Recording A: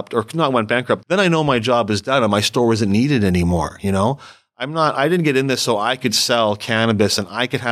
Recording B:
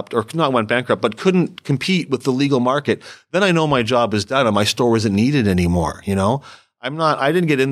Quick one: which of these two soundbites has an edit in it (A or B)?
A